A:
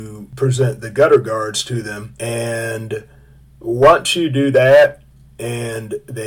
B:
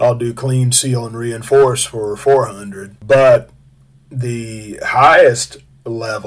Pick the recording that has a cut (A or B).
B